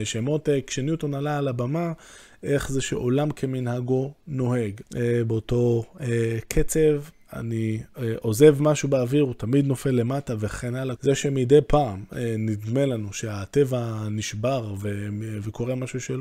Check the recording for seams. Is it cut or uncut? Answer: cut